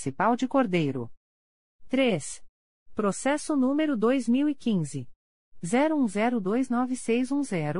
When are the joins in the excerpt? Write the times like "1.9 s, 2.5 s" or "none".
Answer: none